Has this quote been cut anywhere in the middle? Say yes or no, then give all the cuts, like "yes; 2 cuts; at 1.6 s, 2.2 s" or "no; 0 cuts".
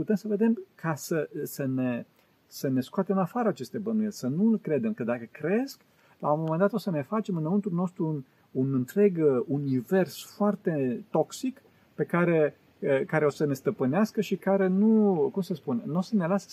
no; 0 cuts